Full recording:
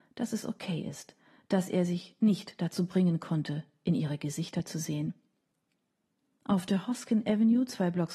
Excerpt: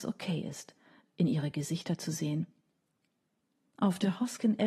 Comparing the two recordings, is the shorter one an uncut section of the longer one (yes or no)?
no